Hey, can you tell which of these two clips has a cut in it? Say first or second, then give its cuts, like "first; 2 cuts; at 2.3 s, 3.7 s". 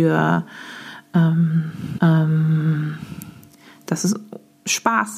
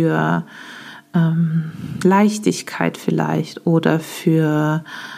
first; 1 cut; at 2.0 s